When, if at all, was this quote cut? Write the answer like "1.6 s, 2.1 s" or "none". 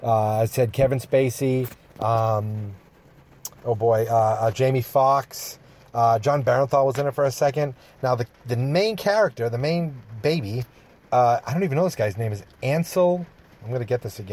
3.6 s